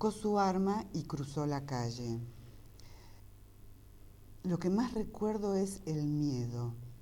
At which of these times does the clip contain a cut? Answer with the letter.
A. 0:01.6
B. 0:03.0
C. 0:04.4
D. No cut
D